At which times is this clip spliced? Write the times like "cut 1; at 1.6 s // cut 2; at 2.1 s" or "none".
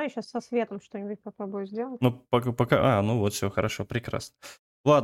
none

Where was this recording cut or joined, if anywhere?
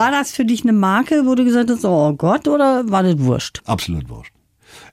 cut 1; at 3.6 s

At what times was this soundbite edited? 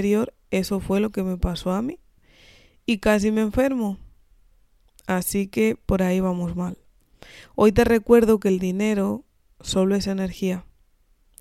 none

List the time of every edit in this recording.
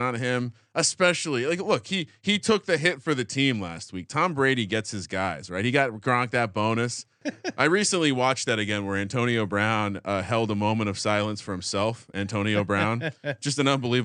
cut 1; at 7.2 s

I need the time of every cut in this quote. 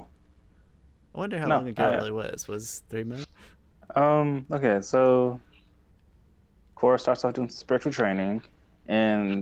cut 1; at 3.2 s

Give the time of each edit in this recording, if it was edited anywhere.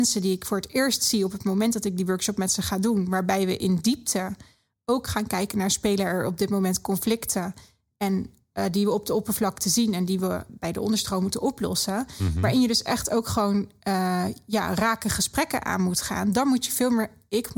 cut 1; at 10.5 s

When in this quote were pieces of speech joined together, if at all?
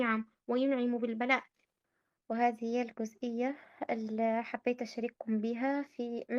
none

